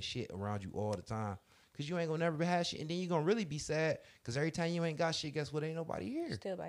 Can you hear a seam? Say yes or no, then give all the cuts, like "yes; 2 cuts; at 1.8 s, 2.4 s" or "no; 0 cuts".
no; 0 cuts